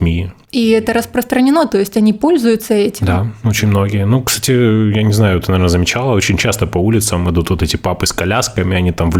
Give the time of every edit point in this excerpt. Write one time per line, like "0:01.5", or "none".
none